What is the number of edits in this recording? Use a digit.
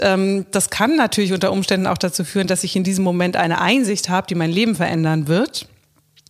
0